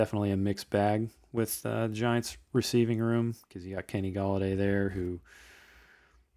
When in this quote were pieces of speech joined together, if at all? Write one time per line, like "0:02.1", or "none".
none